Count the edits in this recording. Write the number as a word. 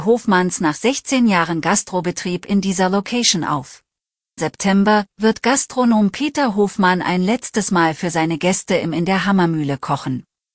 one